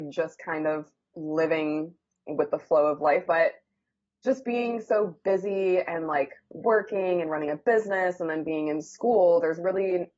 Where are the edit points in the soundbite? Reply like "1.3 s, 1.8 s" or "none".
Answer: 3.3 s

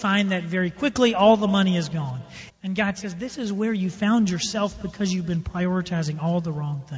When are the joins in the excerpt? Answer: 2.5 s

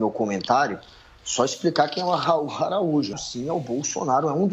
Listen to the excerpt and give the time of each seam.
3.1 s

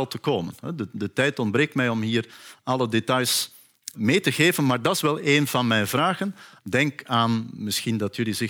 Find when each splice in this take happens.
3.9 s, 6.6 s

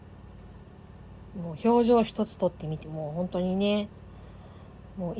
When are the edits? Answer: 2.8 s

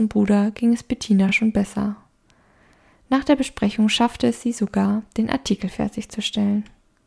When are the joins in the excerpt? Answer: none

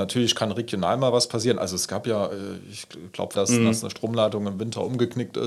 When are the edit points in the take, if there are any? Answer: 3.4 s

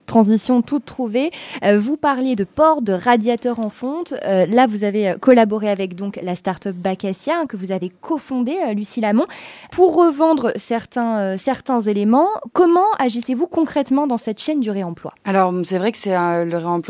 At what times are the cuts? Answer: 15.2 s

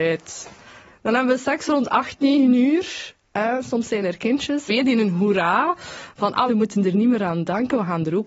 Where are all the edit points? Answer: 4.7 s, 6.5 s

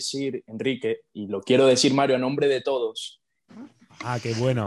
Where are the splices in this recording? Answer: 3.5 s

